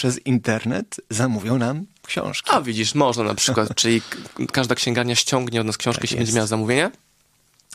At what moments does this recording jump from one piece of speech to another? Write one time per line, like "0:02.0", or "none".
none